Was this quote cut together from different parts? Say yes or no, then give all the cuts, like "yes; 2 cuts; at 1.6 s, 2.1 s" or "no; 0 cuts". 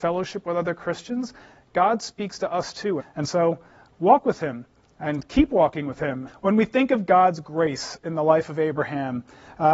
yes; 2 cuts; at 3.0 s, 6.3 s